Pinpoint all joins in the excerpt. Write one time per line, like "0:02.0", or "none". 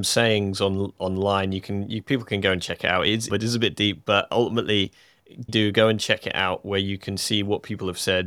0:03.3
0:05.5